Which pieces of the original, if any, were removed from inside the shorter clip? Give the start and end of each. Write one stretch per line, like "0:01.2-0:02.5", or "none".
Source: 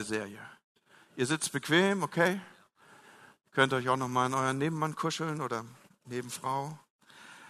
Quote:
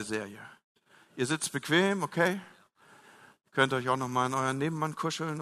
none

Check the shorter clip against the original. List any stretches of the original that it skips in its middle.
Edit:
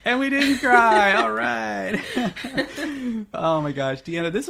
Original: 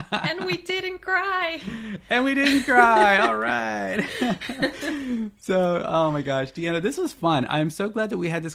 0:05.4-0:05.8

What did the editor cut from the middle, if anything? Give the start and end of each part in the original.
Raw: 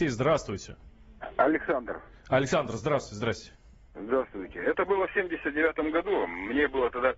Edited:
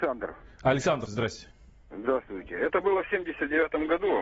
0:02.7-0:03.1

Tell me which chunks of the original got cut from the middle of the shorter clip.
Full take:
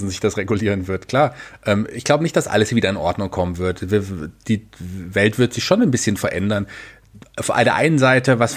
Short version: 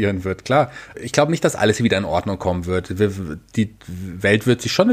0:01.6-0:01.9

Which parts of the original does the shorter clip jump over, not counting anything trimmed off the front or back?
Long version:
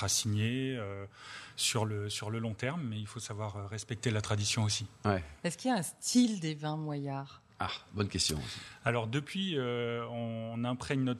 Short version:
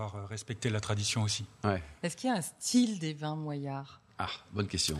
none

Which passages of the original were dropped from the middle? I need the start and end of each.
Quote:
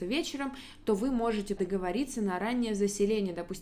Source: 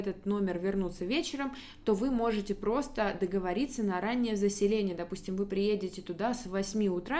0:02.6-0:03.2

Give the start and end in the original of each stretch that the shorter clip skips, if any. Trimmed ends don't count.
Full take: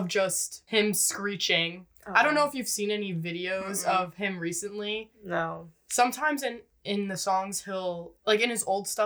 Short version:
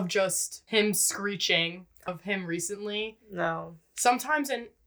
0:02.1-0:04.0

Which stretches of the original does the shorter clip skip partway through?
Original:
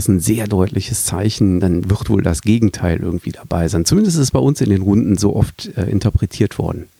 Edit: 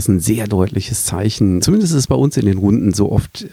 0:01.6-0:03.8

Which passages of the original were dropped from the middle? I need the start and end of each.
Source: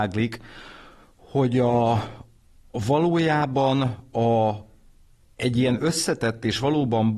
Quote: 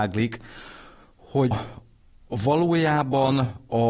0:01.5-0:01.9

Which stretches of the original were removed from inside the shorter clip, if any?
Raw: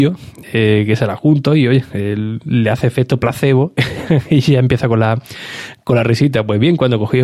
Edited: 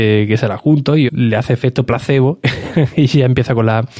0:01.7-0:02.4

